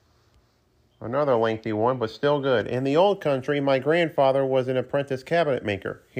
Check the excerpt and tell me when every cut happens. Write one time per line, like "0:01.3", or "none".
none